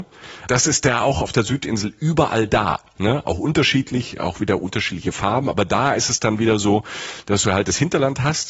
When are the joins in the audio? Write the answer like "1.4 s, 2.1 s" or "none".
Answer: none